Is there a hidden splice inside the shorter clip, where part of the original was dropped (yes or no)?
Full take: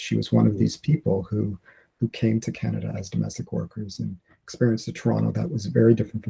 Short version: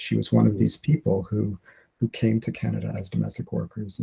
no